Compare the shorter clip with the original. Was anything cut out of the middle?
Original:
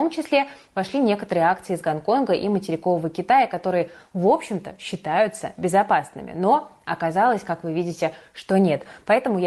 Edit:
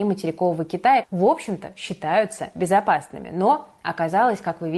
yes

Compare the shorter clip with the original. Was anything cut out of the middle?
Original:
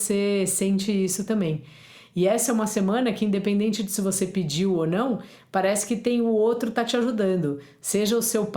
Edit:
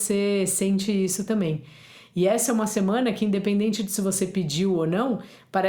no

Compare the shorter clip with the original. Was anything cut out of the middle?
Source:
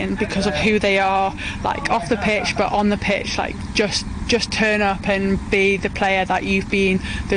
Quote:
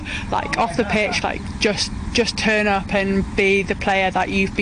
yes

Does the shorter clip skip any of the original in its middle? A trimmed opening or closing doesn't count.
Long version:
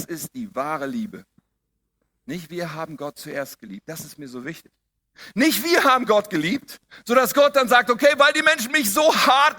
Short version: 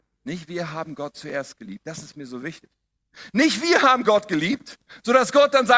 no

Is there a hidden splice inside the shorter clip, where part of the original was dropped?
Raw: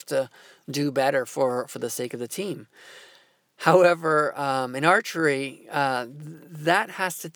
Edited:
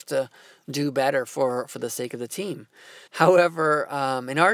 yes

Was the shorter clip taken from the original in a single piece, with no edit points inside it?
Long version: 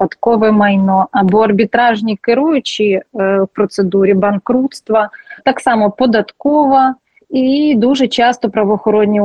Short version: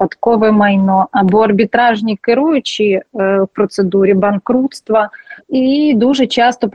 no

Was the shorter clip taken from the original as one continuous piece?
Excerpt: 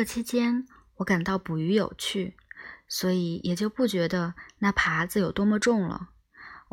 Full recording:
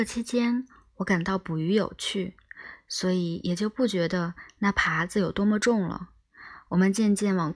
yes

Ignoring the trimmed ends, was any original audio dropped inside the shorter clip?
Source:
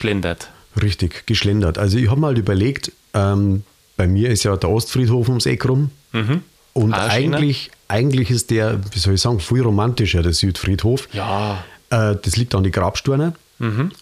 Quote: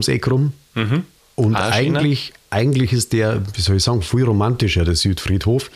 no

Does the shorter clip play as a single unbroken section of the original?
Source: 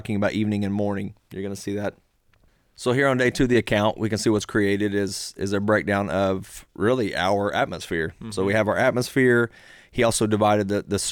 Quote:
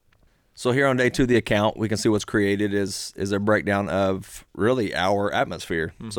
yes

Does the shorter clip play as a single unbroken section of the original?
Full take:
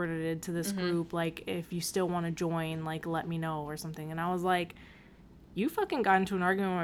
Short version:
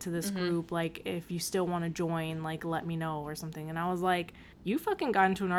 no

